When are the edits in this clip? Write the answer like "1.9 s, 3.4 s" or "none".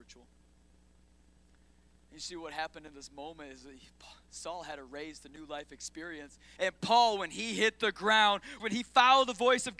6.6 s, 8.6 s